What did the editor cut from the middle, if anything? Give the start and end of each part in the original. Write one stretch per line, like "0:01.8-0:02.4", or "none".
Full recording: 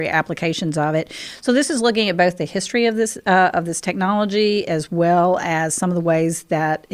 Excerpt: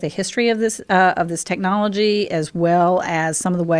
none